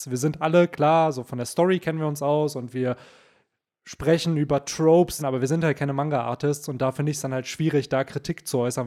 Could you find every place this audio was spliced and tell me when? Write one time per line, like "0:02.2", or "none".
0:05.2